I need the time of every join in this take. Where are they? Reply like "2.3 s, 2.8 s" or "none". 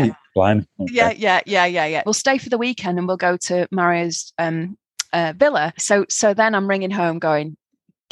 2.1 s, 5.8 s

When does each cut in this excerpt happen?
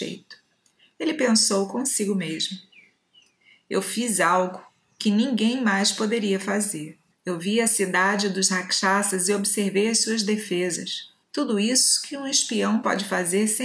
7.1 s, 11.2 s

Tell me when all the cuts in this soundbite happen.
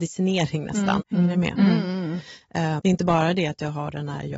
1.0 s, 2.8 s

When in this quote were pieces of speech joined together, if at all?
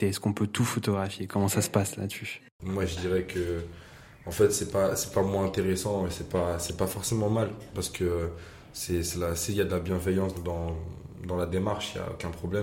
10.3 s

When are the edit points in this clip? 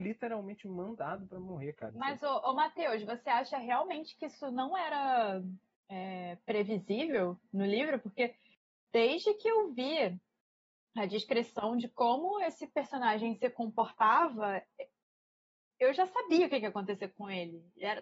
1.9 s

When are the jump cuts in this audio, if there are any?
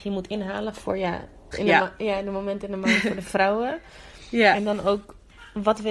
1.5 s

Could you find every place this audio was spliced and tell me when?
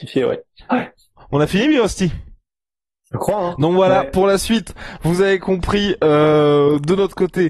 none

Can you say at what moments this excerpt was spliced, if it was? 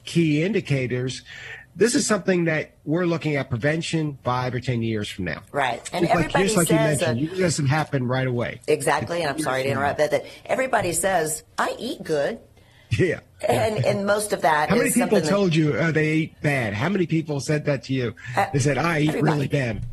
none

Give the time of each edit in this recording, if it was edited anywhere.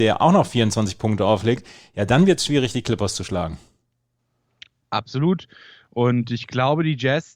none

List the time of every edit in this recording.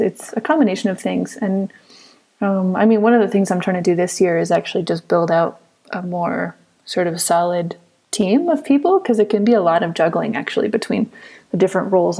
none

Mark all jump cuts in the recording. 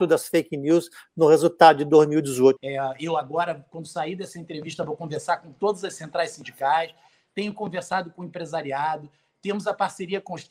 2.6 s

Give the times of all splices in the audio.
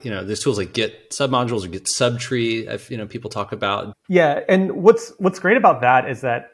3.9 s

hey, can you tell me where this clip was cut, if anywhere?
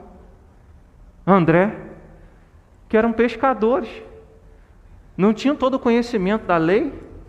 none

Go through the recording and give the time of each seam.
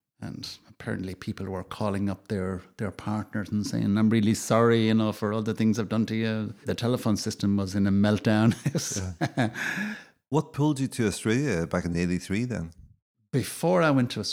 none

